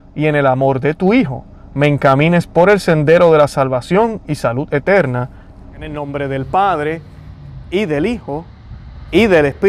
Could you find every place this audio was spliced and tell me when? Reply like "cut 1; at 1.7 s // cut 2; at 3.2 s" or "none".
cut 1; at 5.6 s